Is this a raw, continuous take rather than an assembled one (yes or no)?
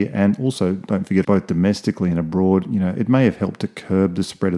no